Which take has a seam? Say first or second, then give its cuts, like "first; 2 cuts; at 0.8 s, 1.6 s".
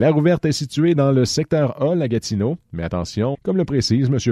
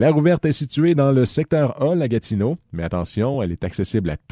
first; 1 cut; at 3.3 s